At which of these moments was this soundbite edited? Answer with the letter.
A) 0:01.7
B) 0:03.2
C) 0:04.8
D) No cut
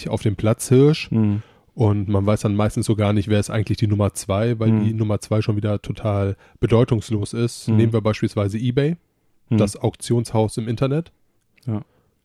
D